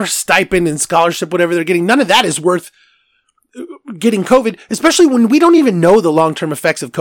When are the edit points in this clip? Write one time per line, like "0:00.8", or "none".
none